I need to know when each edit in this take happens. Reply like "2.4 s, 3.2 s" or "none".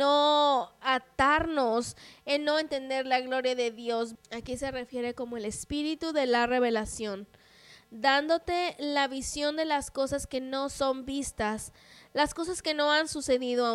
4.2 s